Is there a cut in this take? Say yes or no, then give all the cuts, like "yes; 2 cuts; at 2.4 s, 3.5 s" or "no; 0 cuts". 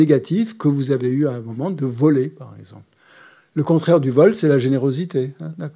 no; 0 cuts